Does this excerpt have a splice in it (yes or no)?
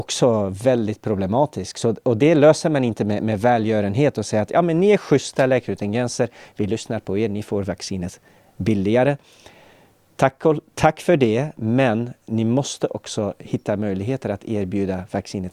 no